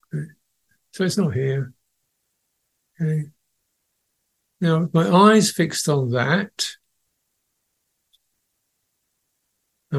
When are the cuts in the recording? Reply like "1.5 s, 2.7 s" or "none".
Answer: 2.9 s